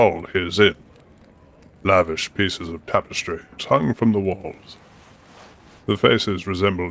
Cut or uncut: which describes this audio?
cut